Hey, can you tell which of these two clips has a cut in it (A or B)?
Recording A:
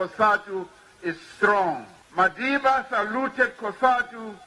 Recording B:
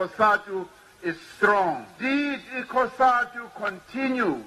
B